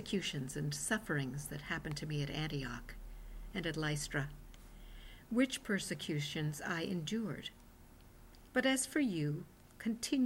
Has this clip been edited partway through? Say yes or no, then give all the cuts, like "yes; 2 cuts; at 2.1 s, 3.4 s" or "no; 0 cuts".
yes; 2 cuts; at 3.5 s, 8.5 s